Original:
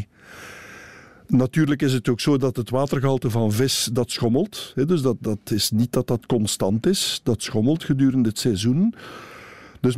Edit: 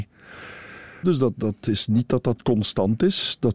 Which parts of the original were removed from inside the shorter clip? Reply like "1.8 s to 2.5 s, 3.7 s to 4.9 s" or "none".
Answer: 1.0 s to 4.9 s